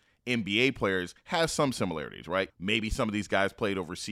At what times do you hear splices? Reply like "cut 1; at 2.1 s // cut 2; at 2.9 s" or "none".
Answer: cut 1; at 2.5 s